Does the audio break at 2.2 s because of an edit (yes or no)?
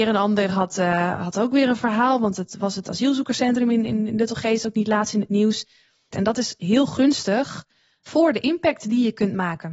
no